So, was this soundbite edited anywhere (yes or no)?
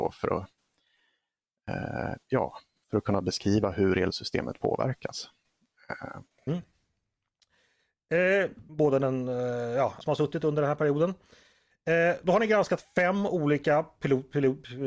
yes